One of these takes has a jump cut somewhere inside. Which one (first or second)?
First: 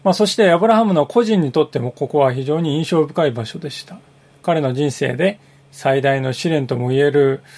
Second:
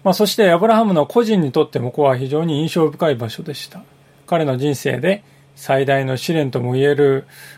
second